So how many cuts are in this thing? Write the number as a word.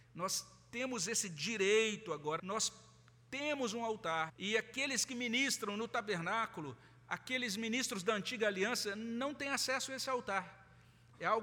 two